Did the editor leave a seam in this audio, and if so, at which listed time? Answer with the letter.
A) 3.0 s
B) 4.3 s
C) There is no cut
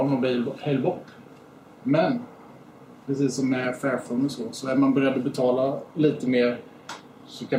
C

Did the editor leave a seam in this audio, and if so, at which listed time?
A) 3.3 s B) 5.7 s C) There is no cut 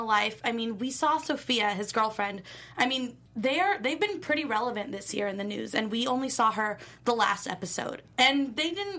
A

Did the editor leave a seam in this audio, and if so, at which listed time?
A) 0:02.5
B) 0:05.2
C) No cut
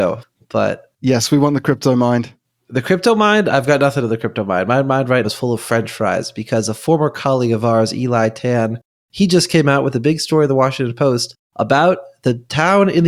B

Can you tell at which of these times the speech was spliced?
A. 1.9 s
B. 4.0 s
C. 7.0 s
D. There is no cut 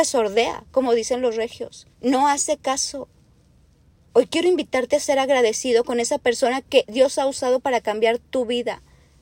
A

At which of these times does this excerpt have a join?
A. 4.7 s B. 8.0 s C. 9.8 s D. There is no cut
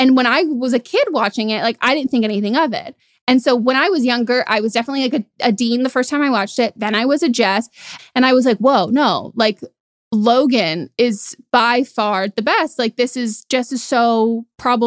B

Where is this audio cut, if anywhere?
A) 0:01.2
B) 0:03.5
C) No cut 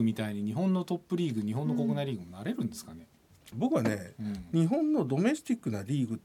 B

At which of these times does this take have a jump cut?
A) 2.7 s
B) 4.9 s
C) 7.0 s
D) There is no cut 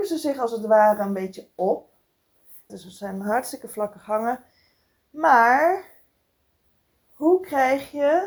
A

